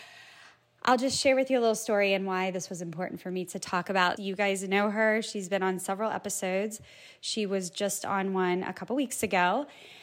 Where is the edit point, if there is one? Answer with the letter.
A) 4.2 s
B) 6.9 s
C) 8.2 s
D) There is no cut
A